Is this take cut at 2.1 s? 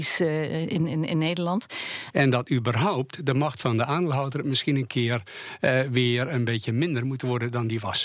yes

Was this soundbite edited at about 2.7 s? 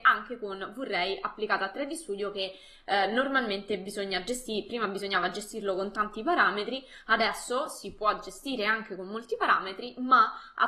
no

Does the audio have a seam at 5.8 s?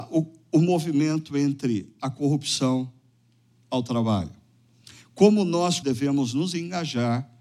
yes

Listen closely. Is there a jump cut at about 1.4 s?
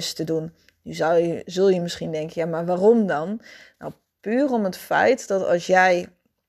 no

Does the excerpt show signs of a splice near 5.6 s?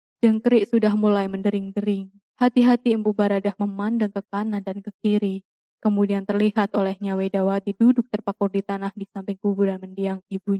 no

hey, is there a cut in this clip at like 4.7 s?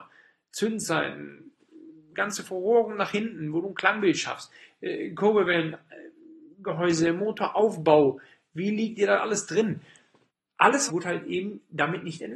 no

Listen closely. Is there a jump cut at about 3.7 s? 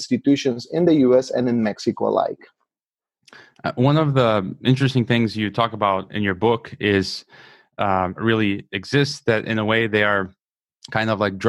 no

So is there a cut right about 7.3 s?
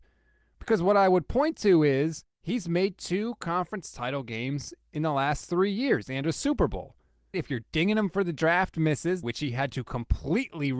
yes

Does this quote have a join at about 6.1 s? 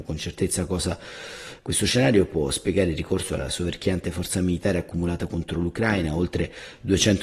no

